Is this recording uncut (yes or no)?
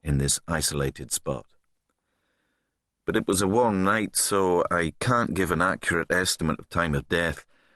yes